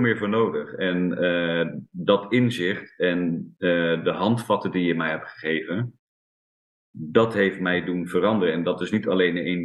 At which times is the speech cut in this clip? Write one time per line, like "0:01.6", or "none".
none